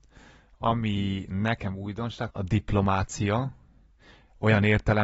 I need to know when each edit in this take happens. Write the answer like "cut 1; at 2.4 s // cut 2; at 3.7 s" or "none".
cut 1; at 2.3 s